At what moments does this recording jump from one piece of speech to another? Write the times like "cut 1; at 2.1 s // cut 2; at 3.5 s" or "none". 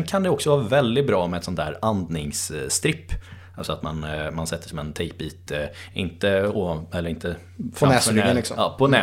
none